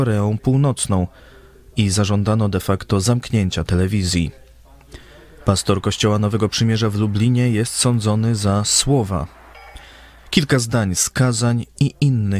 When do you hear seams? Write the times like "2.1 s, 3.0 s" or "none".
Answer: 5.4 s